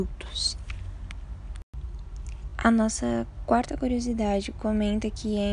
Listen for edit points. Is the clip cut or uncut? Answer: uncut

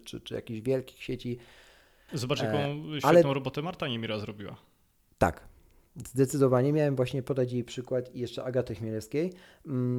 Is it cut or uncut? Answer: cut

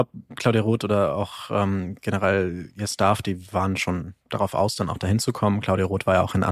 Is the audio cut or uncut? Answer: cut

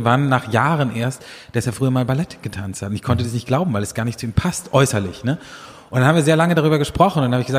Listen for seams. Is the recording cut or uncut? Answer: uncut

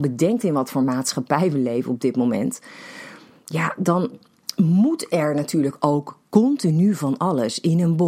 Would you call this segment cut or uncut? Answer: uncut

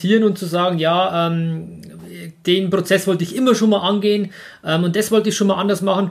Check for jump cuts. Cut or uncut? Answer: uncut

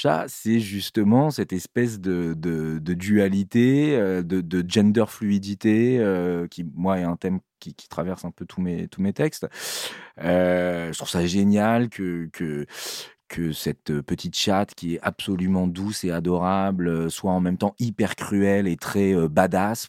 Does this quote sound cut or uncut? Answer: uncut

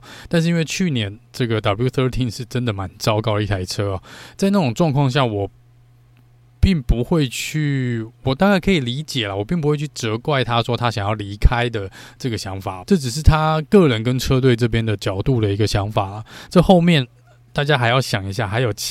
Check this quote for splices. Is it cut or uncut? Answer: cut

